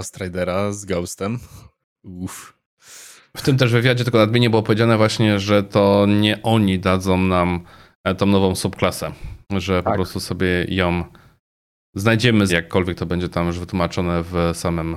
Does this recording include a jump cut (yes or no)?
yes